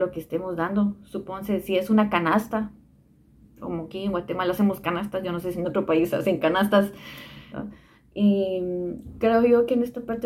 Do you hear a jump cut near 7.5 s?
yes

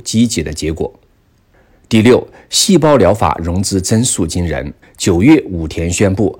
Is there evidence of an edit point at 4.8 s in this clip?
yes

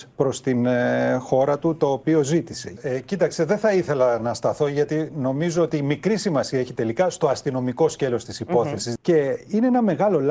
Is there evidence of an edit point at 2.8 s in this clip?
yes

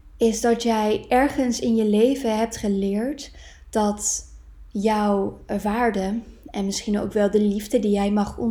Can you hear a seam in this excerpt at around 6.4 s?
no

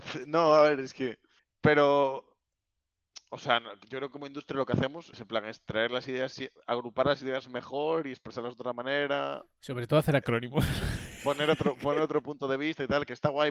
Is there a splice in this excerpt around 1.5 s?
no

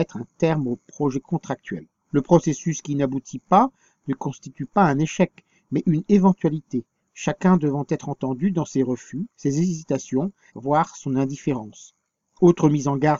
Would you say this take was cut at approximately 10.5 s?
yes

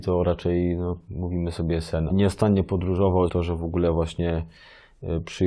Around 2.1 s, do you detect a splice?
yes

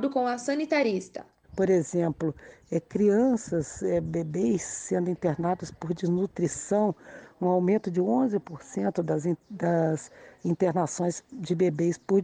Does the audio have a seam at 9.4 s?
no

